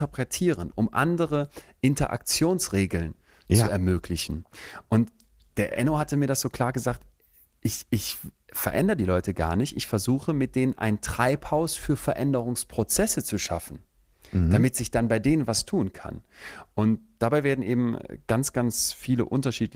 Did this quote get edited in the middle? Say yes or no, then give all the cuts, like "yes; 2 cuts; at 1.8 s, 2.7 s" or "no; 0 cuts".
no; 0 cuts